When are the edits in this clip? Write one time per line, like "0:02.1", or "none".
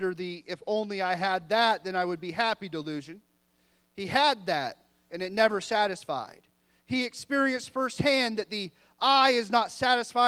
none